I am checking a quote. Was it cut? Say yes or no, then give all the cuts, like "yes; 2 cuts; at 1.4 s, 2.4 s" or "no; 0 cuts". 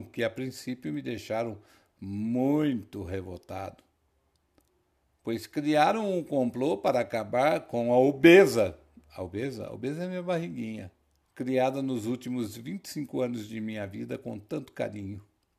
yes; 1 cut; at 11.2 s